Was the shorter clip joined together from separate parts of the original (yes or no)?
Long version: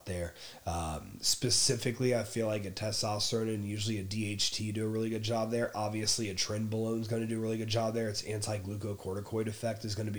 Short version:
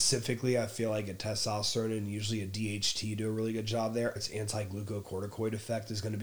yes